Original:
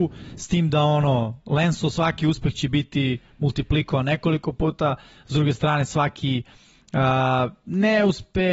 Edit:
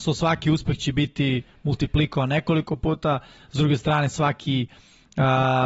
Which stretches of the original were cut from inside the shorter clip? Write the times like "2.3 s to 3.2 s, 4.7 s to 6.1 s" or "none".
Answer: none